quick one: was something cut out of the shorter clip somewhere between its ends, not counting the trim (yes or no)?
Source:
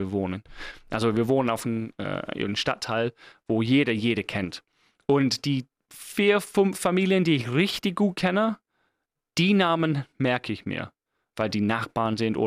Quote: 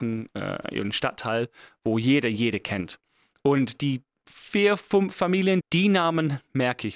yes